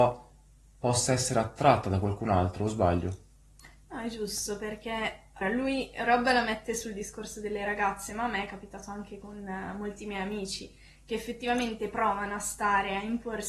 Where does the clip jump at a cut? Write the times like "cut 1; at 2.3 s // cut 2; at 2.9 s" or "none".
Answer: cut 1; at 5.4 s

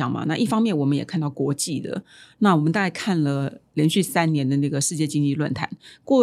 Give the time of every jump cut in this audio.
none

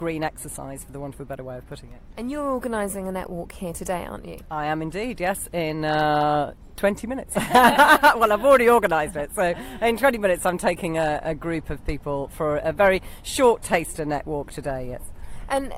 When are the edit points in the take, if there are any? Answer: none

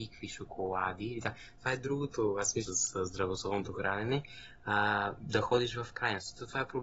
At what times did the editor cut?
cut 1; at 2.7 s

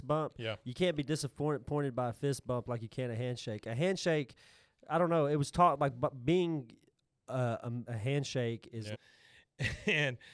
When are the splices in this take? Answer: cut 1; at 7.8 s // cut 2; at 8.9 s

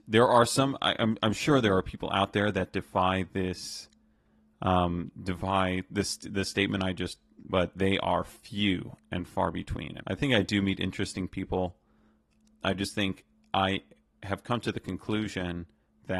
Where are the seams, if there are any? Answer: cut 1; at 7.5 s // cut 2; at 10.0 s

